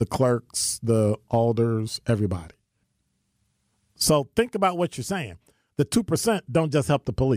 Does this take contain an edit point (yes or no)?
no